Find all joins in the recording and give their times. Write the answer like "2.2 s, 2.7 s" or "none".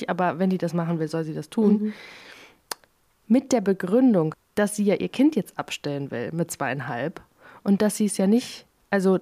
4.3 s